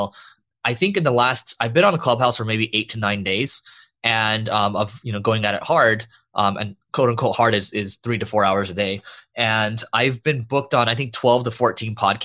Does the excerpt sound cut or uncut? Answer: uncut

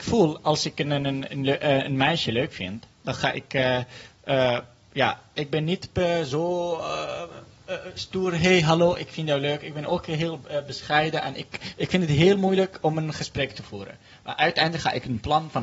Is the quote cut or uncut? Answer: uncut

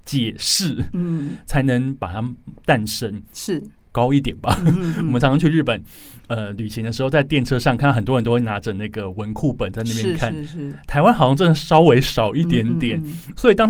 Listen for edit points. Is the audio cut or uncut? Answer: cut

